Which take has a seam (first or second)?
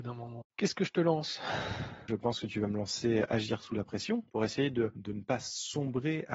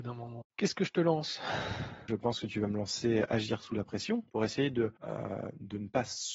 first